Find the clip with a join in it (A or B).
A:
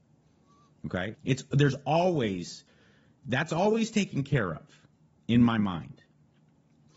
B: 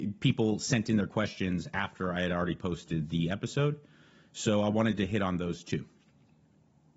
A